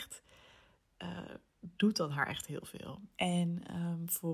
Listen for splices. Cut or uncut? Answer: cut